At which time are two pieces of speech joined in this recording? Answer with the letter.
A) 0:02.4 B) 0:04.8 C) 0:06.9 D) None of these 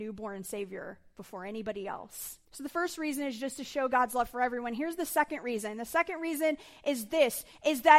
A